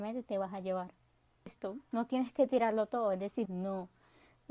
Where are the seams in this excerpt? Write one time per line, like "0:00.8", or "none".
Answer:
0:03.4